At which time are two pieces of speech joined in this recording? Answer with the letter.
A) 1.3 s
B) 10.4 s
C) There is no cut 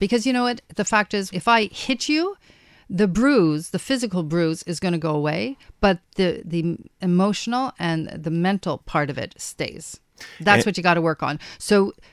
A